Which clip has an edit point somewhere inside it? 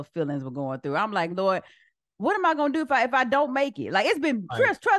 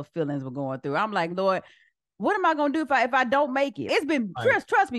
second; 1 cut; at 3.9 s

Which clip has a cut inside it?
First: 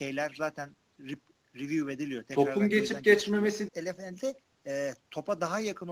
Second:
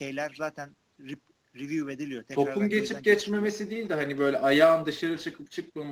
first; 2 cuts; at 3.7 s, 5.0 s

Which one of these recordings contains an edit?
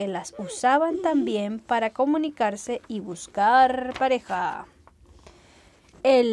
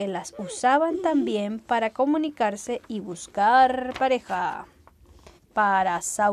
second; 1 cut; at 5.4 s

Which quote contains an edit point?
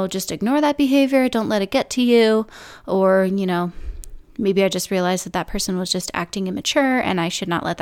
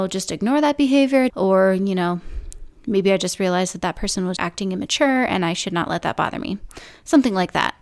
second; 2 cuts; at 1.3 s, 4.4 s

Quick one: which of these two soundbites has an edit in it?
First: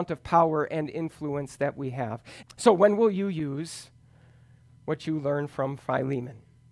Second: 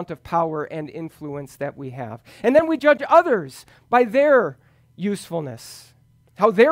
first; 1 cut; at 2.4 s

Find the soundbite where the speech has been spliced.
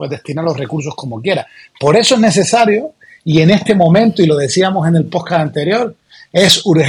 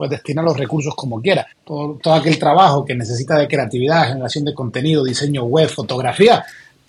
second; 1 cut; at 1.5 s

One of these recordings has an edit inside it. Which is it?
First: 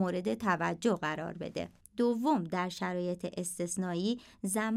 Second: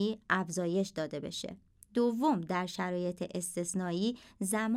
first; 1 cut; at 1.8 s

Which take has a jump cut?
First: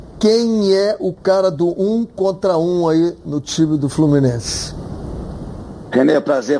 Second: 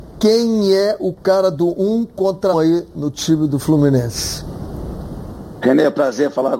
second; 1 cut; at 2.5 s

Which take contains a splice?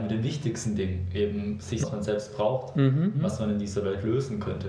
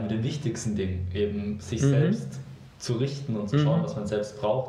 first; 2 cuts; at 1.8 s, 3.1 s

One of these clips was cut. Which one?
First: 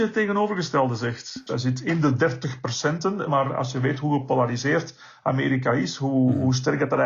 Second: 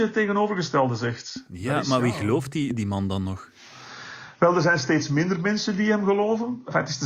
first; 2 cuts; at 1.5 s, 3.3 s

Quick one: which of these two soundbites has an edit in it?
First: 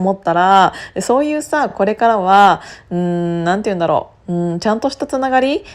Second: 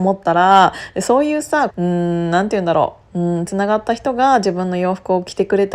second; 2 cuts; at 1.7 s, 3.5 s

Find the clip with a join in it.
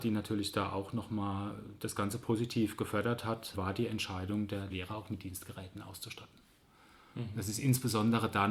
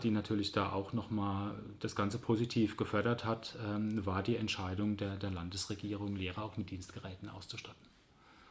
first; 2 cuts; at 3.5 s, 4.7 s

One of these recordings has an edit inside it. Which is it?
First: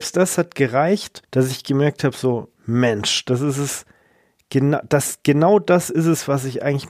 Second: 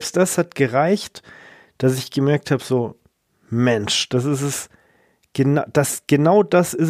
first; 2 cuts; at 1.2 s, 2.6 s

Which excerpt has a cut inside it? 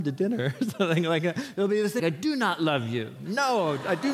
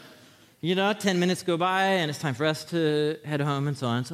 first; 1 cut; at 2.0 s

